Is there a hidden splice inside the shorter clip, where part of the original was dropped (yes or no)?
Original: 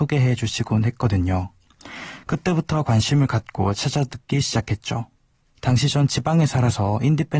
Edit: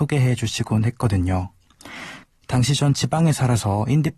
yes